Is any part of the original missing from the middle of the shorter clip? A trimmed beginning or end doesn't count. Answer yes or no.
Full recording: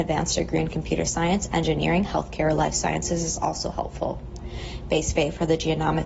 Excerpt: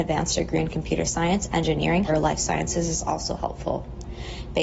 yes